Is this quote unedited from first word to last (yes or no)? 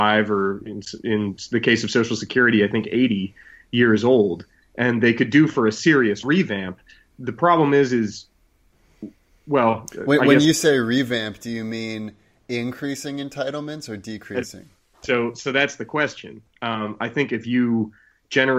yes